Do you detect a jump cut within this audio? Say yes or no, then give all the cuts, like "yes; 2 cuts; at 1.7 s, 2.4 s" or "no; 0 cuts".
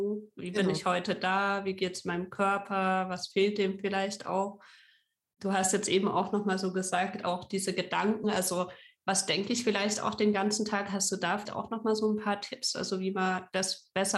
no; 0 cuts